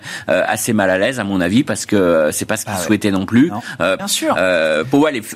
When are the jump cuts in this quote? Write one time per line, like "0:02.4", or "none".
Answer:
0:04.0